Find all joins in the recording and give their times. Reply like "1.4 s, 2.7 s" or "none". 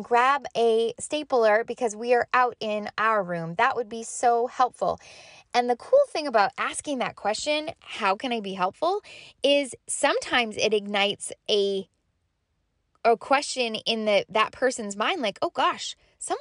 none